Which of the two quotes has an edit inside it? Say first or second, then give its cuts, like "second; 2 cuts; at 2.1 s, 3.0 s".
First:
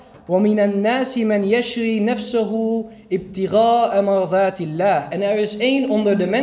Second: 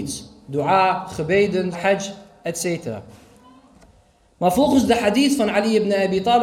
second; 1 cut; at 1.7 s